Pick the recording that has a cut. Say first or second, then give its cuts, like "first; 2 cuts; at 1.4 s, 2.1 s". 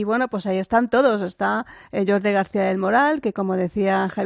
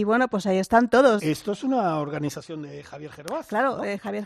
second; 1 cut; at 1.2 s